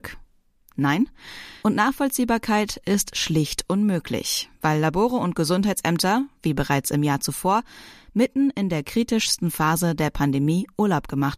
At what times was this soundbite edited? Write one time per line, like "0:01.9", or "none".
0:01.6